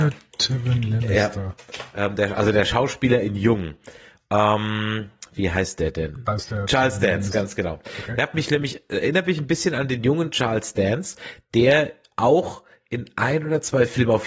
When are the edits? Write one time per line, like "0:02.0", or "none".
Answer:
0:06.2